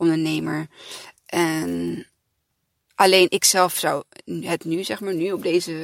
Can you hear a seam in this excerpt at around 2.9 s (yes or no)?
no